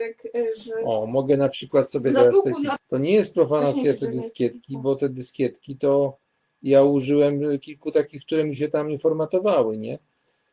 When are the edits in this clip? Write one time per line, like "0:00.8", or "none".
0:02.8